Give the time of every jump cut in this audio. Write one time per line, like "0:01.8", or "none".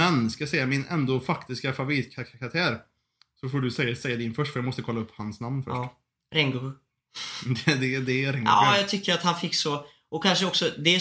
none